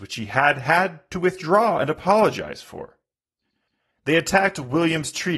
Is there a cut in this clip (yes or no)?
no